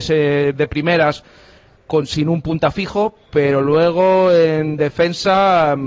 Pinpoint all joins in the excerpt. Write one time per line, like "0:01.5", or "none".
0:01.8